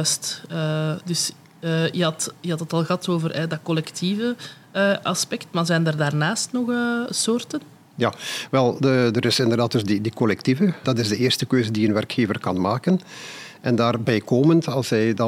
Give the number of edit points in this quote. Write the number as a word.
one